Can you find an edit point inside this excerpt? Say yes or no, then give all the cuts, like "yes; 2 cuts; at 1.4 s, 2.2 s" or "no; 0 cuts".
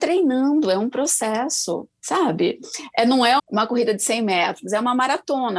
yes; 1 cut; at 3.4 s